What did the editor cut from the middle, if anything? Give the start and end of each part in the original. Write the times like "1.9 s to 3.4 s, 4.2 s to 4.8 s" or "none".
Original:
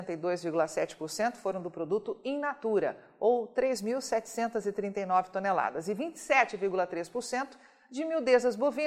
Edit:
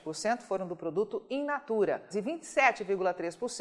3.0 s to 5.8 s